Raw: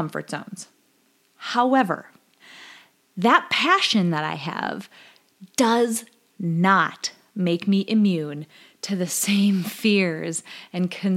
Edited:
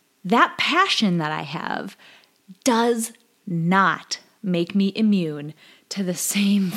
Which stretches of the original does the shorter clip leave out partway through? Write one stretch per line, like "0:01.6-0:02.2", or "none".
none

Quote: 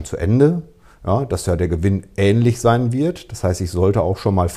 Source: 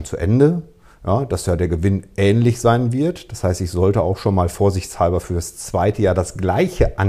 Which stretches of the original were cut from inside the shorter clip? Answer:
none

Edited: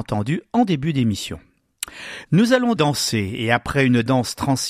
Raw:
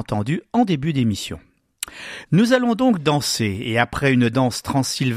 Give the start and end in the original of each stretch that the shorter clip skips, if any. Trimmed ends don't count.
0:02.8-0:03.0

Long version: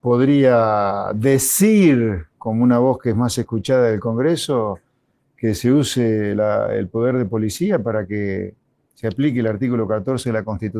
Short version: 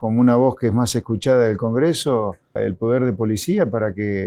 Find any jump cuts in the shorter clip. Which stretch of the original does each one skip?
0:05.0-0:06.7

